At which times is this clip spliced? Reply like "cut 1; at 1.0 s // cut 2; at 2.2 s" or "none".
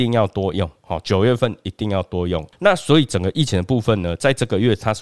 none